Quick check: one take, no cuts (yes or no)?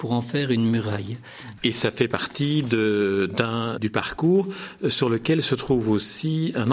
no